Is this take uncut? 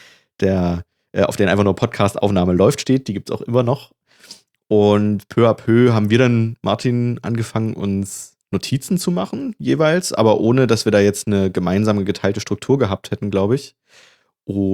yes; 0 cuts

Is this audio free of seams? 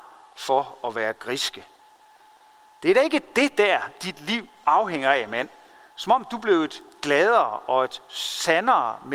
yes; 0 cuts

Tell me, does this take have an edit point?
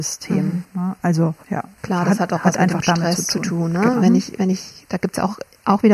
yes; 2 cuts; at 1.4 s, 4.0 s

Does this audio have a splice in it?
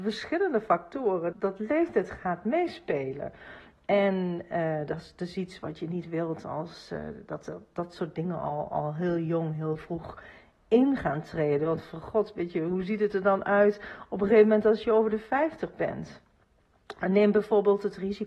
yes; 1 cut; at 1.3 s

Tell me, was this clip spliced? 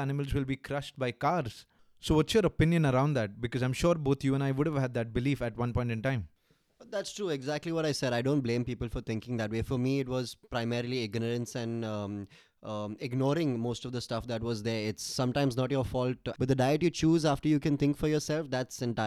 yes; 1 cut; at 16.3 s

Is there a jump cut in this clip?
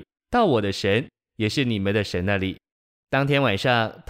no; 0 cuts

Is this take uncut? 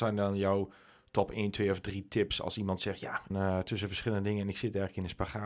no; 1 cut; at 3.3 s

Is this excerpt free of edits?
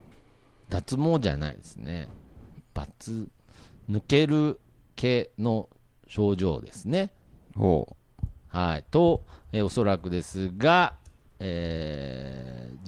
yes; 0 cuts

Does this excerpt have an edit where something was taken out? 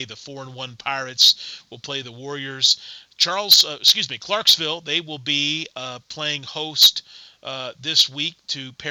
no; 0 cuts

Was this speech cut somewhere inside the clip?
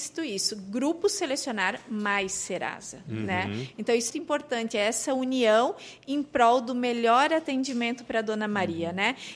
yes; 1 cut; at 4.1 s

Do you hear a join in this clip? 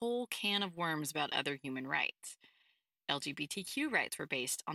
no; 0 cuts

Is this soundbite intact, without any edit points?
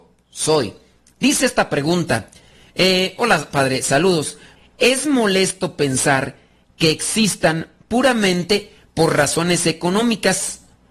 no; 1 cut; at 4.6 s

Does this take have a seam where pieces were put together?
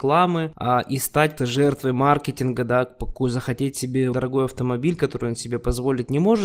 yes; 2 cuts; at 1.4 s, 4.1 s

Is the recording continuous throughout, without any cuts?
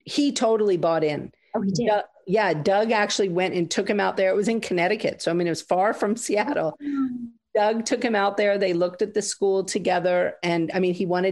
yes; 0 cuts

